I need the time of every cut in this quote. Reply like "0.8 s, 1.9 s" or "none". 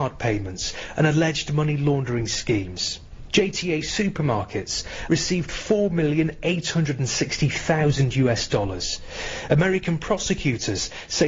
5.1 s